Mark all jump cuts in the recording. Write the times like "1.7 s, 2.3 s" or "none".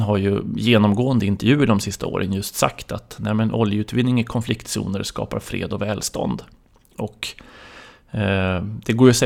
none